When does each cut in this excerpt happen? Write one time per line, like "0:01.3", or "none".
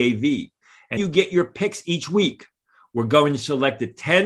0:01.0